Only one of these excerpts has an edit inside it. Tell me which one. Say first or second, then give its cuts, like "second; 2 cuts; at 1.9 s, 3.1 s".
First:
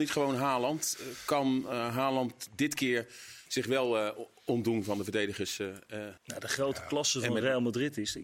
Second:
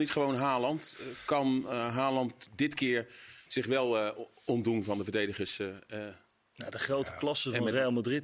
first; 1 cut; at 6.2 s